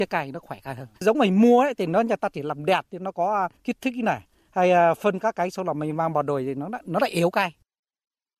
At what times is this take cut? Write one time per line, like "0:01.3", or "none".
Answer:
0:00.9